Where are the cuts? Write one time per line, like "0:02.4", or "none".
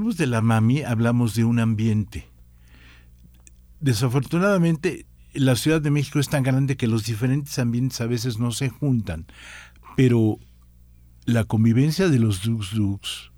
none